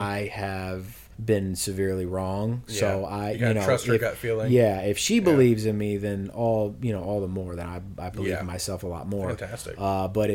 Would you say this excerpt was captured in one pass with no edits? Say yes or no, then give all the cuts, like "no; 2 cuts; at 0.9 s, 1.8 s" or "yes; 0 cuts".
no; 1 cut; at 1.1 s